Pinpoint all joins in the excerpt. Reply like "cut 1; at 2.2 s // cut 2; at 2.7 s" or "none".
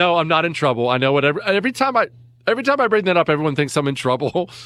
none

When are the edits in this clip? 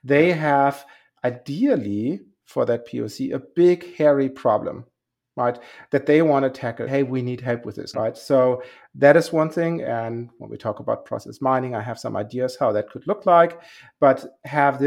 cut 1; at 6.9 s // cut 2; at 7.9 s

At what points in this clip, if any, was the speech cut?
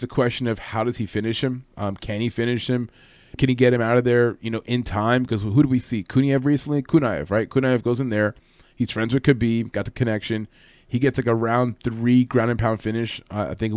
cut 1; at 3.4 s

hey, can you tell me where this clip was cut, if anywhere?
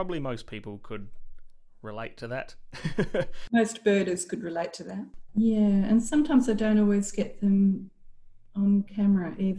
cut 1; at 5.3 s

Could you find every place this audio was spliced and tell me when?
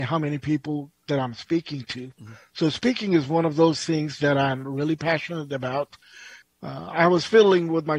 cut 1; at 6.4 s

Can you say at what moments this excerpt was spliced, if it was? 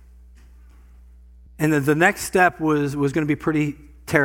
cut 1; at 1.5 s

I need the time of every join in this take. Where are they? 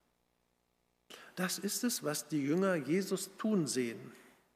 none

